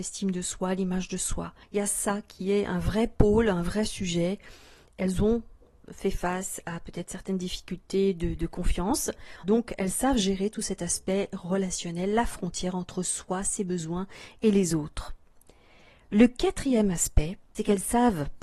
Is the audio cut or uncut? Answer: cut